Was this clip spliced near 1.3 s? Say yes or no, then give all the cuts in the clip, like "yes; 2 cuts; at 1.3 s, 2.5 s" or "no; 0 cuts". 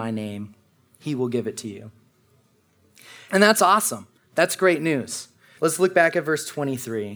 no; 2 cuts; at 3.3 s, 5.6 s